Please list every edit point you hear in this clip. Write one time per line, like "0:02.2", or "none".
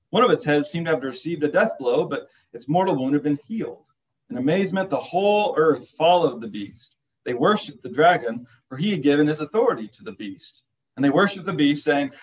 none